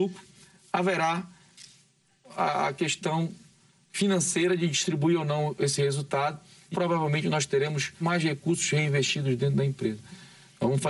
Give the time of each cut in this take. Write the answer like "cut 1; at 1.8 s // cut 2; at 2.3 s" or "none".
cut 1; at 6.7 s // cut 2; at 8.0 s